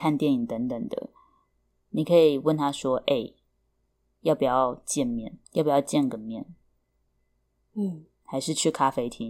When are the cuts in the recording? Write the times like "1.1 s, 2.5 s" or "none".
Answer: 5.4 s, 8.2 s